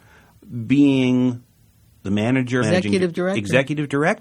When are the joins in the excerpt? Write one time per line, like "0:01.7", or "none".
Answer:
0:02.6